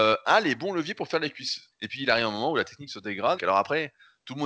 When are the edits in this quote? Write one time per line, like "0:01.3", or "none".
0:01.7
0:03.4